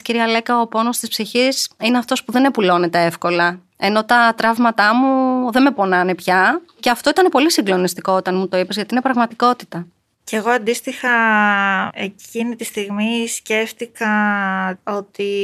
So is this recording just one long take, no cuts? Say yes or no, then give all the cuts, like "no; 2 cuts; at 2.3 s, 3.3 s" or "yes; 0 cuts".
yes; 0 cuts